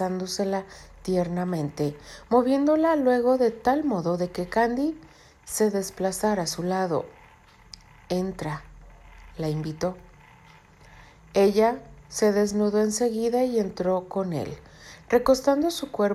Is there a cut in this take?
no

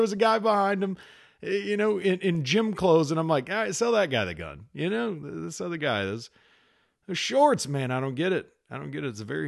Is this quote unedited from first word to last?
yes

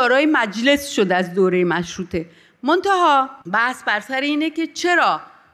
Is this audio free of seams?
no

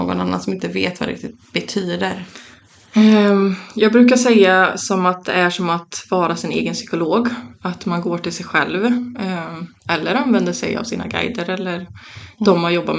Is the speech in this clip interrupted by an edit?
yes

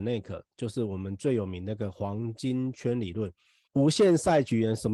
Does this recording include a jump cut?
yes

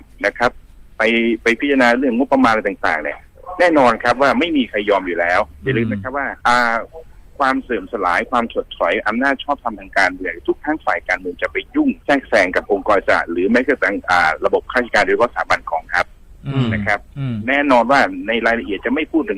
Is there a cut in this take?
yes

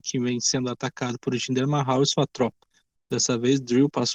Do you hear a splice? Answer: no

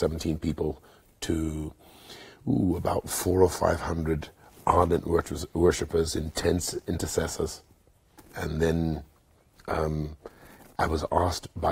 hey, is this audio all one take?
no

